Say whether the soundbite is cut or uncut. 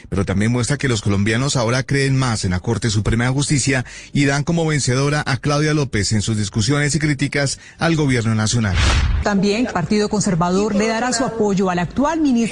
cut